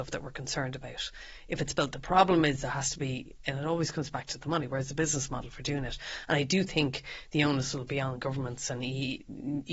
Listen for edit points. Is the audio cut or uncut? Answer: uncut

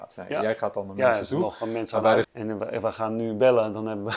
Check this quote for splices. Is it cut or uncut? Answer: cut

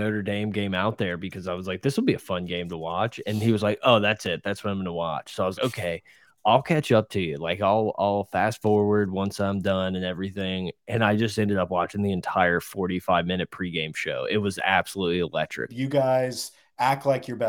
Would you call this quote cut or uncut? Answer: cut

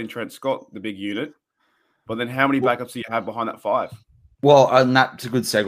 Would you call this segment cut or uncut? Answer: uncut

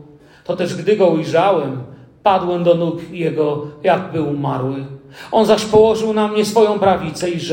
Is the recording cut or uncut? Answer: uncut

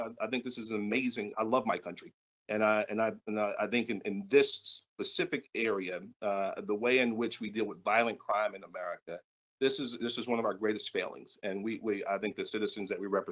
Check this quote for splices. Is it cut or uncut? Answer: cut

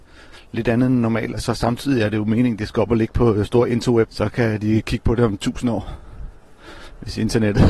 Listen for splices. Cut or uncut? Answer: cut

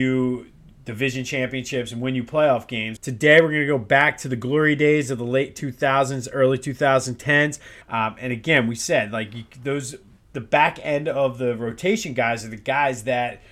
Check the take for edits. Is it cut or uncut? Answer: cut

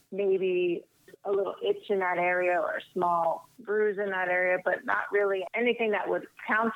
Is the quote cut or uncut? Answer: uncut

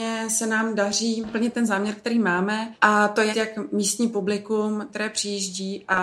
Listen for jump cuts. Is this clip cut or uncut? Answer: cut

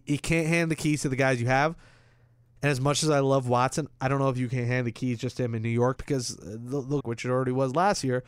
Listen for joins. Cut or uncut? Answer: cut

